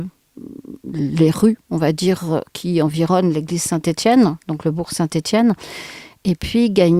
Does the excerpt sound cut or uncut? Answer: uncut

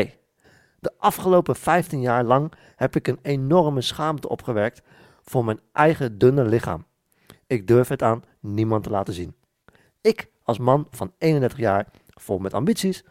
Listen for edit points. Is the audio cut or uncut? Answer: uncut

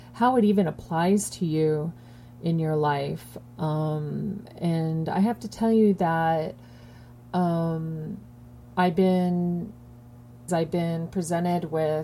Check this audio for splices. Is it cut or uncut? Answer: cut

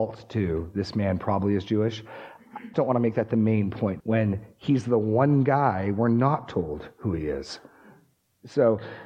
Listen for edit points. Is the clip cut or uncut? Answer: cut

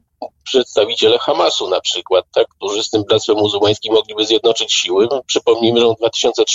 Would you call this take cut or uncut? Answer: uncut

